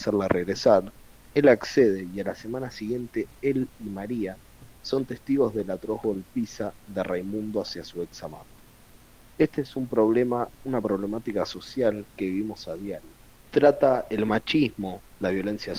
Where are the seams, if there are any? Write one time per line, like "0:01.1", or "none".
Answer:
0:04.8
0:13.5